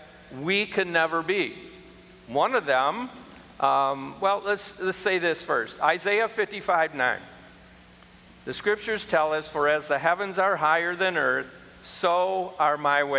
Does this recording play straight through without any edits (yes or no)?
yes